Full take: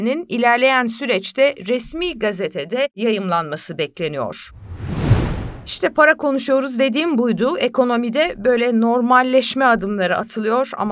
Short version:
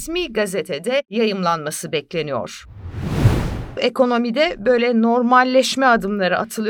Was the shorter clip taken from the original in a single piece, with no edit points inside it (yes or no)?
no